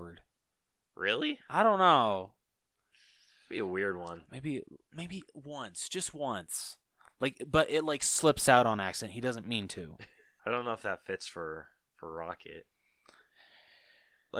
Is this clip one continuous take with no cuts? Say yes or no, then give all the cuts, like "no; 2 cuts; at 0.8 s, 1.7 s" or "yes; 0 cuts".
no; 1 cut; at 10.4 s